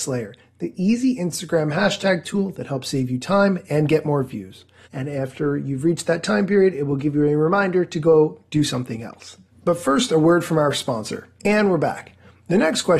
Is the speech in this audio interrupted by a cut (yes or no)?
yes